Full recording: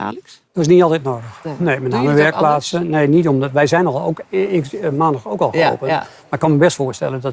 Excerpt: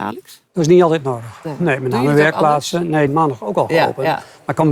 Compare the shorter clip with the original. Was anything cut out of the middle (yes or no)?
yes